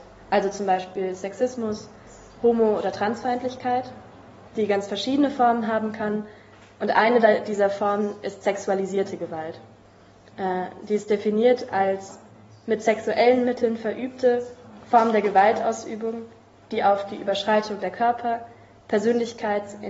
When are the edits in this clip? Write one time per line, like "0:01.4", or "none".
0:04.5